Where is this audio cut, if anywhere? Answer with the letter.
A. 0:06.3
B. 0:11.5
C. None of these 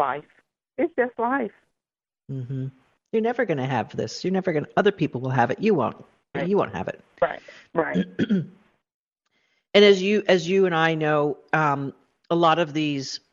A